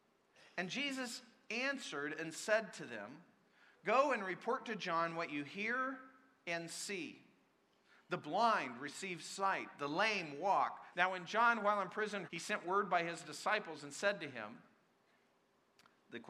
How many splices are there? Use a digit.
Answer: 2